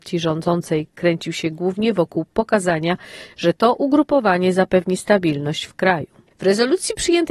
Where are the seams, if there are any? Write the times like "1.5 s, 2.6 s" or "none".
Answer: 6.3 s